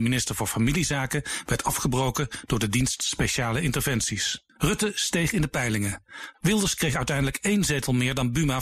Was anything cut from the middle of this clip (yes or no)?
yes